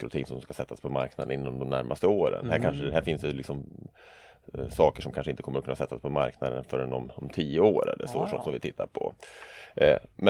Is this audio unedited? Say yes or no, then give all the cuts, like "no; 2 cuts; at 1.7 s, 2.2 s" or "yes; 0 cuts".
yes; 0 cuts